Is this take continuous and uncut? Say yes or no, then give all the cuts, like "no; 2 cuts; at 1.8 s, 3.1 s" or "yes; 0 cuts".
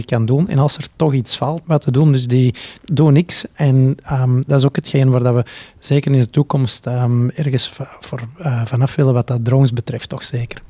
no; 2 cuts; at 1.6 s, 2.8 s